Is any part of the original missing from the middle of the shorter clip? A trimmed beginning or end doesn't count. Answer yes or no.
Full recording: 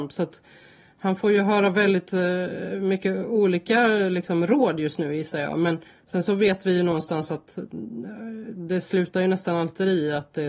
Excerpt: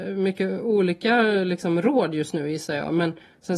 no